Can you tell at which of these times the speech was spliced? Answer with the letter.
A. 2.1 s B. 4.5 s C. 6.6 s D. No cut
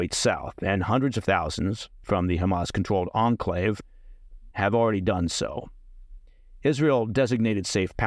B